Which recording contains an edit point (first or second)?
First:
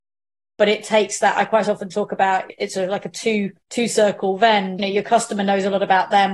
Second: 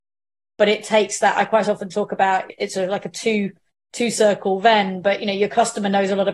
first